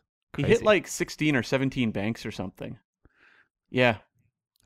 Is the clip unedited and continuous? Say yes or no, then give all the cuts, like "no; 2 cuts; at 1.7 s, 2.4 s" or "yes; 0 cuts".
no; 1 cut; at 3.6 s